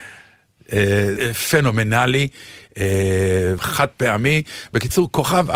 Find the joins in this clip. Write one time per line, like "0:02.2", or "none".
0:01.2
0:03.6